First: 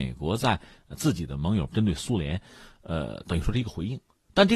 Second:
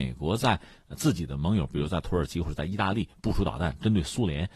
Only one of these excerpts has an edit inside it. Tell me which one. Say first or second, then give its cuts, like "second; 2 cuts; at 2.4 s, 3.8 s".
first; 1 cut; at 1.7 s